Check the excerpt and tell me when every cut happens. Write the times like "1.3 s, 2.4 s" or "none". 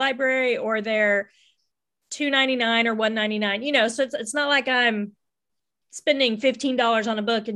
none